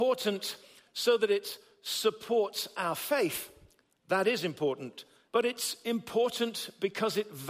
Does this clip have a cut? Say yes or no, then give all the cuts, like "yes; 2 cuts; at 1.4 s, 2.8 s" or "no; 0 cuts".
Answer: yes; 1 cut; at 5.3 s